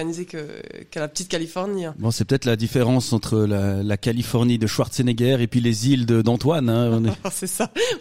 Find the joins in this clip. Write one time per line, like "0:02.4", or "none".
none